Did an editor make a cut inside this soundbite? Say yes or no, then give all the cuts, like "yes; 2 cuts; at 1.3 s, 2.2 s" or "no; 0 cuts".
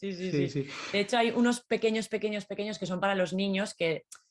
no; 0 cuts